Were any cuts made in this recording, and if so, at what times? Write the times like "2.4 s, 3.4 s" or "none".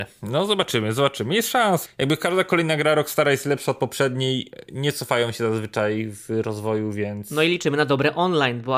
1.9 s